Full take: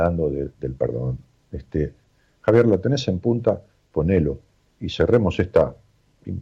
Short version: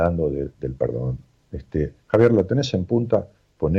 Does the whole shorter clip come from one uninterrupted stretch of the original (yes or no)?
no